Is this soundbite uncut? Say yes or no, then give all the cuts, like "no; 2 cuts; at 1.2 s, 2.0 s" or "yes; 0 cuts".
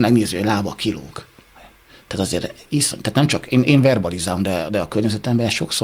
yes; 0 cuts